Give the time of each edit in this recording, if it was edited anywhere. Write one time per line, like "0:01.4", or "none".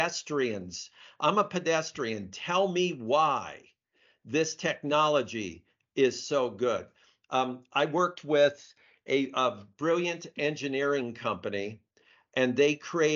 none